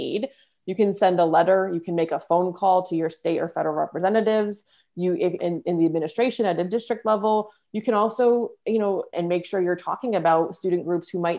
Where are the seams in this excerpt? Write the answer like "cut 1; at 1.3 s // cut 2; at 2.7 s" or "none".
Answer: cut 1; at 5.4 s // cut 2; at 9.1 s